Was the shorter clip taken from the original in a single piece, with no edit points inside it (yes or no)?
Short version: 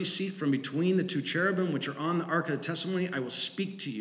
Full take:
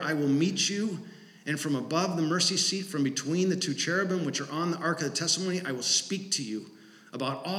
yes